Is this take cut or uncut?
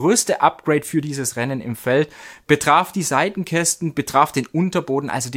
uncut